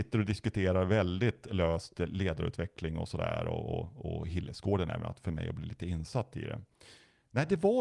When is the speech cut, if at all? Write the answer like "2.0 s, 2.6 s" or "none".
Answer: none

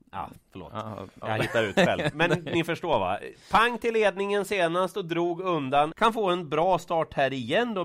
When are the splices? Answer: 1.2 s, 5.9 s

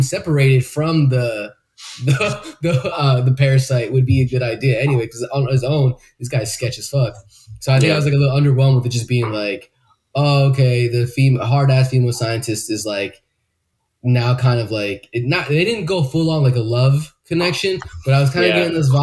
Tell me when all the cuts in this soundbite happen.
none

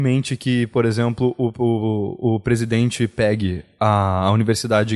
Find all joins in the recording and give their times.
none

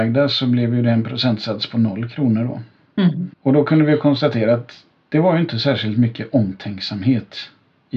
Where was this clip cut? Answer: 3.3 s

